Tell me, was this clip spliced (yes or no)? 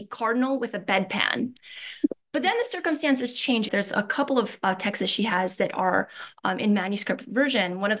yes